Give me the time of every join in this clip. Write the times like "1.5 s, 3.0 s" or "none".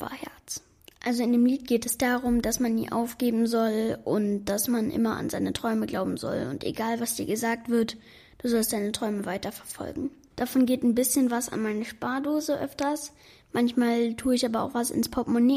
10.3 s